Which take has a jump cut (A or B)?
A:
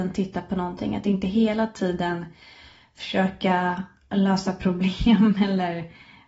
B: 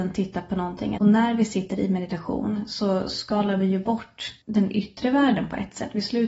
B